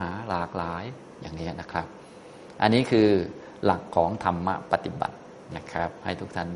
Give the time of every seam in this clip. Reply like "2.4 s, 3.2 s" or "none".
none